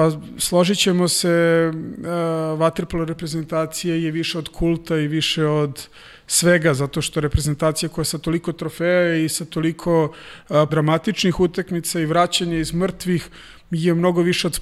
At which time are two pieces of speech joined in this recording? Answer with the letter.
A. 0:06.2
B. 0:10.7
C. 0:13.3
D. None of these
B